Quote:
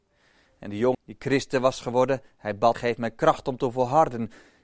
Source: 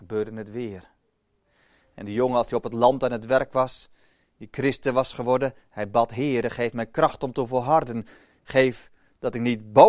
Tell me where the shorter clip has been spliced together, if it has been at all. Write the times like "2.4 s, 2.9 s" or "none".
0.9 s, 2.7 s